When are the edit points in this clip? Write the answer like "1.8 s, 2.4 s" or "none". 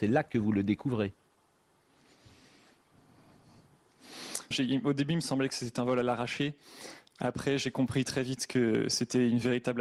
4.5 s